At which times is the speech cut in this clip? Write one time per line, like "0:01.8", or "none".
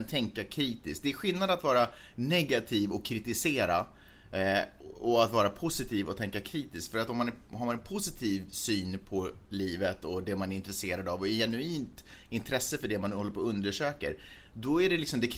none

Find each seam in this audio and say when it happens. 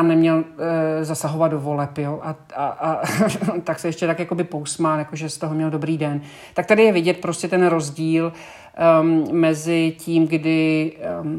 none

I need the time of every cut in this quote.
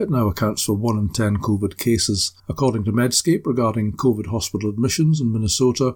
0:02.4

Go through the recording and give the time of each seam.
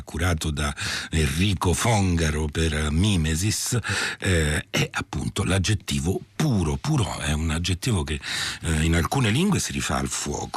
none

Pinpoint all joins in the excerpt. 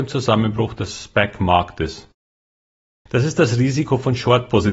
0:03.1

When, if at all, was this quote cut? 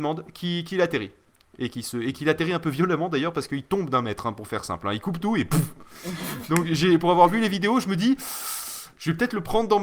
none

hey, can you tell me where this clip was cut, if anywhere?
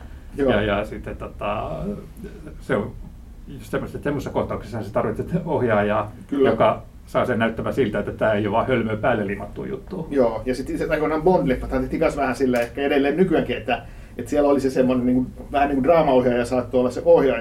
none

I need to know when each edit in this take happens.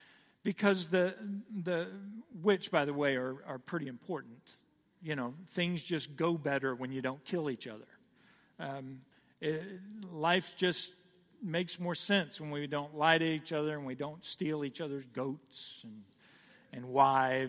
none

